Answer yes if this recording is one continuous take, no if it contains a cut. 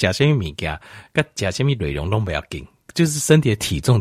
yes